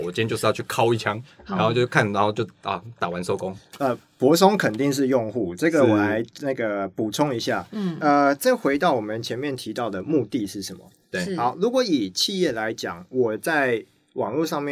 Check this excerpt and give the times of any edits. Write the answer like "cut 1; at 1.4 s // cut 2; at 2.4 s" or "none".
none